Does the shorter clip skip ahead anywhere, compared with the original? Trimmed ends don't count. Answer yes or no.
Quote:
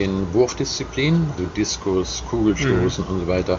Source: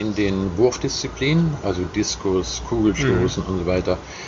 yes